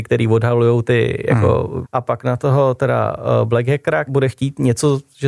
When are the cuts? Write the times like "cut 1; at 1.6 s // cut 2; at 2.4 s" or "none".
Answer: cut 1; at 1.8 s // cut 2; at 4.1 s